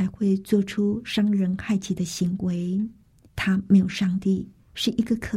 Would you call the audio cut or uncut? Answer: cut